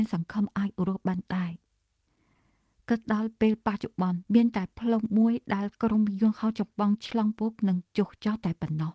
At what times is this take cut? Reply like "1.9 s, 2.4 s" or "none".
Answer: 4.3 s, 7.3 s